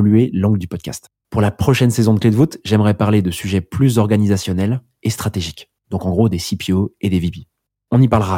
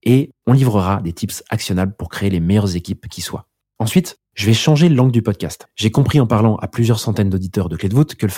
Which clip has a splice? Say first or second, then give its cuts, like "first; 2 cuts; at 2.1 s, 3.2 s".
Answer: first; 2 cuts; at 1.2 s, 5.8 s